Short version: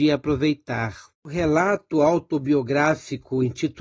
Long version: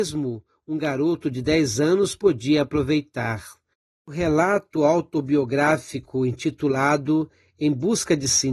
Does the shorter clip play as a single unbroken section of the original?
no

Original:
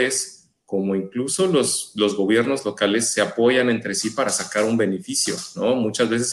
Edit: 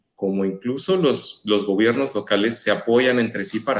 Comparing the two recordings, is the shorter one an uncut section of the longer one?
yes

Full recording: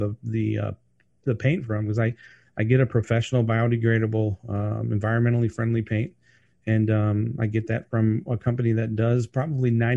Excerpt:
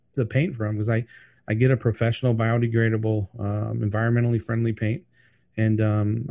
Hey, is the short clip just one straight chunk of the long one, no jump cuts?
yes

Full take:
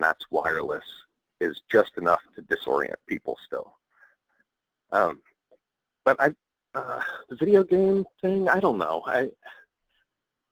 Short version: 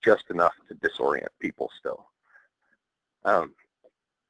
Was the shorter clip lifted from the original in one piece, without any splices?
yes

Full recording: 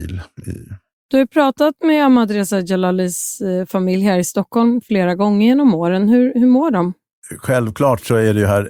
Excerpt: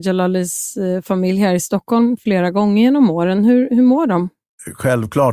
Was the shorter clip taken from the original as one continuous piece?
yes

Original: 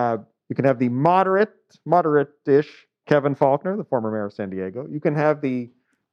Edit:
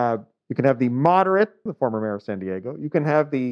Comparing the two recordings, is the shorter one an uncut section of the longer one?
no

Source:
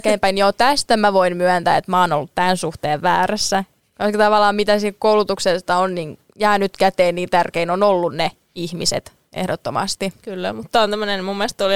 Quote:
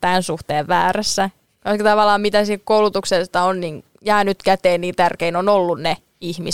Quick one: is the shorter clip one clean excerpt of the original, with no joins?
yes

